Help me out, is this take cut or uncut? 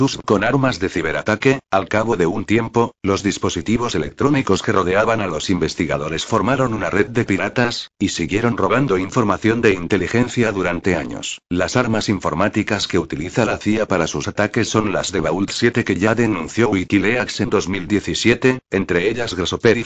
cut